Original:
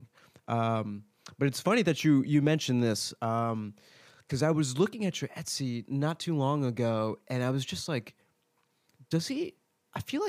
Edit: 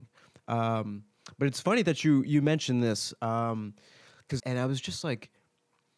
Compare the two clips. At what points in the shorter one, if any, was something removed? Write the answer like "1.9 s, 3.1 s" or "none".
4.4 s